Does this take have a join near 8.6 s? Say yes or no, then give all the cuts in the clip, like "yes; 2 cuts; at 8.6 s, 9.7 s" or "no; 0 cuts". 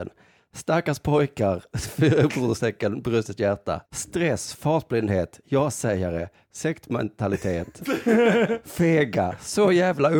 no; 1 cut; at 3.8 s